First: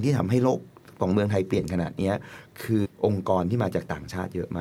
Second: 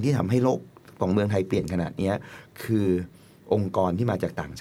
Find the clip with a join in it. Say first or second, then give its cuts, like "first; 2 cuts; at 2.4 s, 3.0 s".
first; 1 cut; at 2.8 s